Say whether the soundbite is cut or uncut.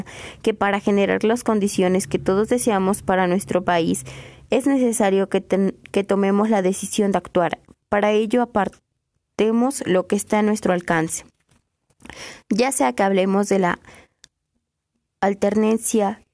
uncut